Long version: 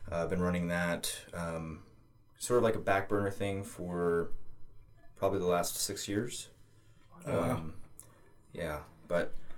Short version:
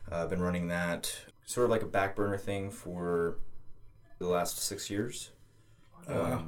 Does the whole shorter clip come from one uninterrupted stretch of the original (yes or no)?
no